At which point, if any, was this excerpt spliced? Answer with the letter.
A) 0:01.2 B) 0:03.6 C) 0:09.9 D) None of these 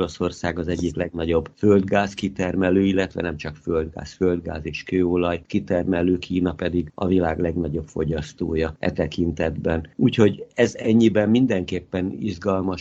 D